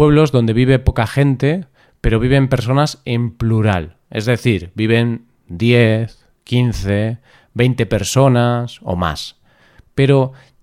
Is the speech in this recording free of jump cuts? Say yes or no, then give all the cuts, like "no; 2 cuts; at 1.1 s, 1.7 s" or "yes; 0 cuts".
yes; 0 cuts